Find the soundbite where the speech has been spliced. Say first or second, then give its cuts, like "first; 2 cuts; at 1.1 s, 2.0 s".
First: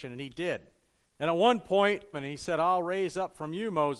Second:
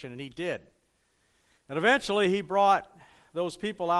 first; 2 cuts; at 1.0 s, 2.1 s